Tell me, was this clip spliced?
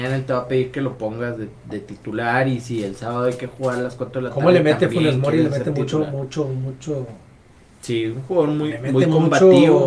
no; 0 cuts

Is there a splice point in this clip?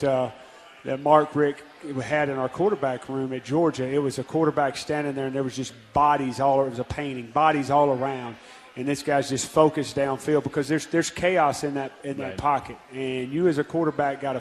no; 0 cuts

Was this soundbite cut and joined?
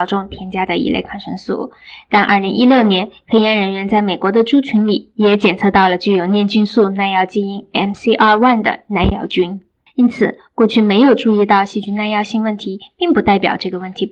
yes; 1 cut; at 9.9 s

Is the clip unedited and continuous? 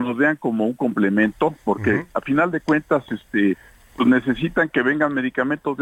yes; 0 cuts

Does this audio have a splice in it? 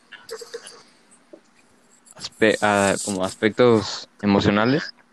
no; 0 cuts

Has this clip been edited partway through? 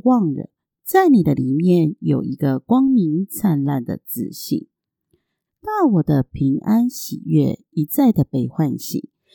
yes; 1 cut; at 5.5 s

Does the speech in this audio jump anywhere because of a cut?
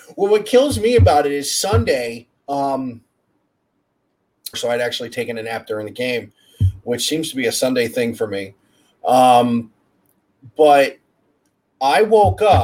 yes; 1 cut; at 4.5 s

